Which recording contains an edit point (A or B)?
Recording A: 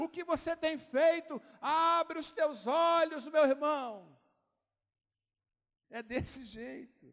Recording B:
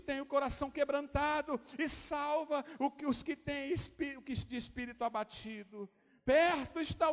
A